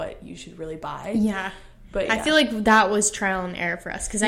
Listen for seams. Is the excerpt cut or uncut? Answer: uncut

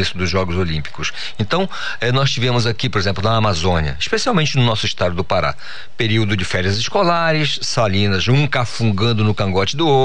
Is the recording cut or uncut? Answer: uncut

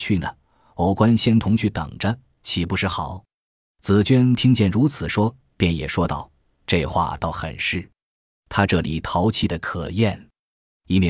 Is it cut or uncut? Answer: uncut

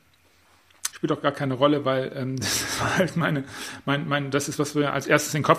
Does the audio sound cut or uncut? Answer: cut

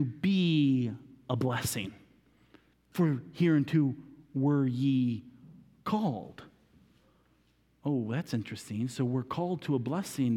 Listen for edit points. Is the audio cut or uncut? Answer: cut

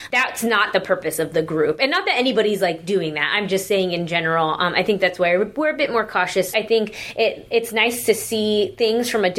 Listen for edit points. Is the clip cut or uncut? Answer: cut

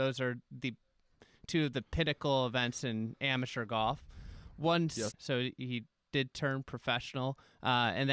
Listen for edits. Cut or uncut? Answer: cut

